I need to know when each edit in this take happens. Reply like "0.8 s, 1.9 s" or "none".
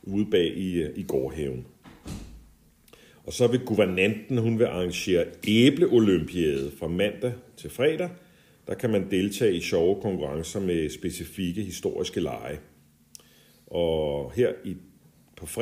none